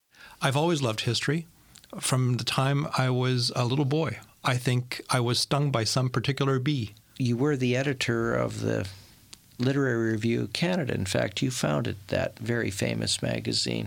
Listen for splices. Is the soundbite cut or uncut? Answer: uncut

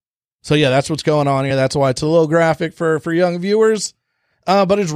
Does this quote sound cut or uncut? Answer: uncut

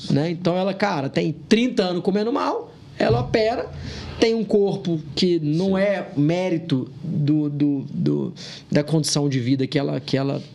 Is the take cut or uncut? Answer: uncut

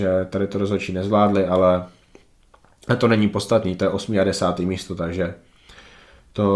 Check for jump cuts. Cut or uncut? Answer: uncut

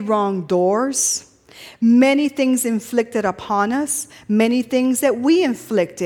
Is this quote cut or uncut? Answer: uncut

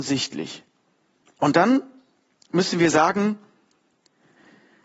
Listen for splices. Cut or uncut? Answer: cut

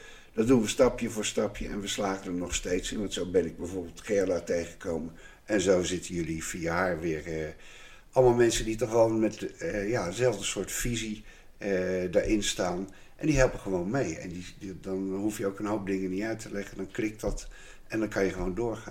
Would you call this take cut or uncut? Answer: uncut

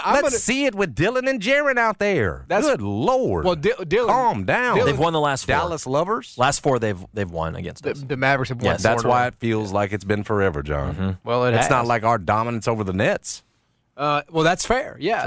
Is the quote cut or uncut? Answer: uncut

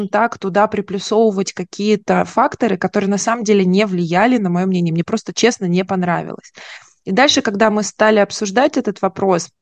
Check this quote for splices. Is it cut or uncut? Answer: uncut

